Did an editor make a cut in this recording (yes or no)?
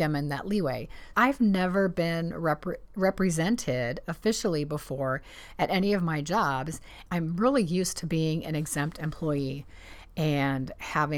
yes